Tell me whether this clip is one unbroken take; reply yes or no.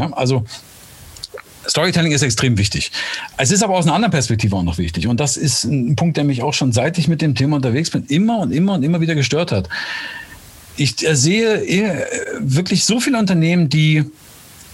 yes